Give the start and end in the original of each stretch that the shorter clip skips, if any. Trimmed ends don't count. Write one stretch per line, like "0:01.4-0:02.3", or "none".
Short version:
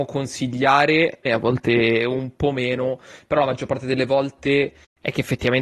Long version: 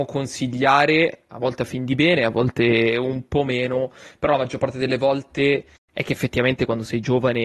0:01.2-0:02.2